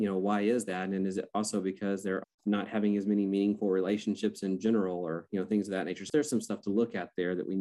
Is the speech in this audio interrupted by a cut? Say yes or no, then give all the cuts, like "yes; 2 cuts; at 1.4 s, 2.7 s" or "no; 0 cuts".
yes; 2 cuts; at 2.2 s, 6.1 s